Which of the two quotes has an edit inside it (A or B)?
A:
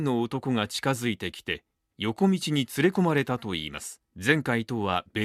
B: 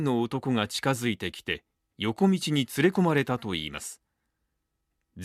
A